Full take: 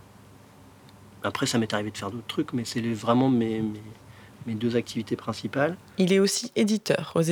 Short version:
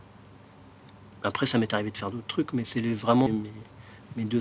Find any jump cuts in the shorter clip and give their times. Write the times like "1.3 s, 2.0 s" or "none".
3.3 s